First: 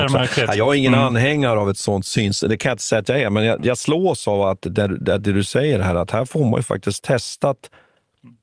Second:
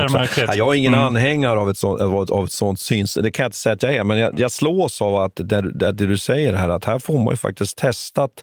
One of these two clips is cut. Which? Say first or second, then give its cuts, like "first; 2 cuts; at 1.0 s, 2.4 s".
first; 1 cut; at 1.8 s